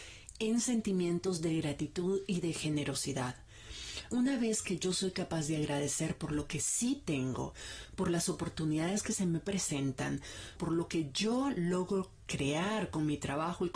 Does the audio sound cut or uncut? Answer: cut